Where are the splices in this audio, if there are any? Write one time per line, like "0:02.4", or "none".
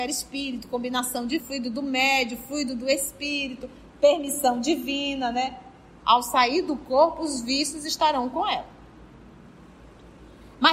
0:01.4
0:06.0